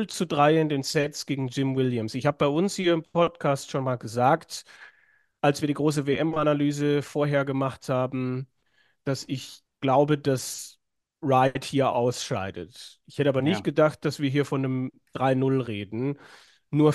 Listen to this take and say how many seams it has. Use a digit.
0